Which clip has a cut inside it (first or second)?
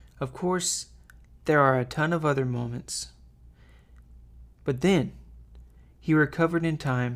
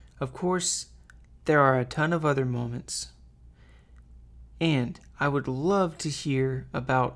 first